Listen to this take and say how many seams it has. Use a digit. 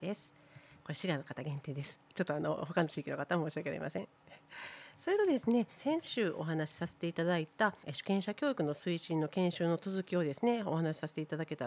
2